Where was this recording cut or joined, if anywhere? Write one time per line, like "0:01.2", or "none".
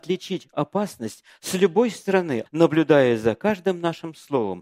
0:02.5